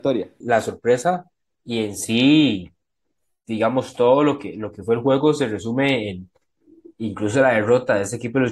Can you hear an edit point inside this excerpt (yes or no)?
no